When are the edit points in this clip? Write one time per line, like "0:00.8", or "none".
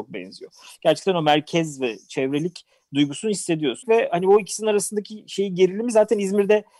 0:03.8